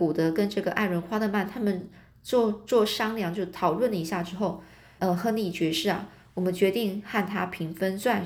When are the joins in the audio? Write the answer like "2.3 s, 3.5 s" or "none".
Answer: 5.0 s